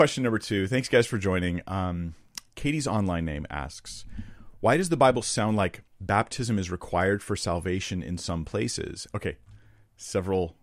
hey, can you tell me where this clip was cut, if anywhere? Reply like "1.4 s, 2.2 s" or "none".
9.1 s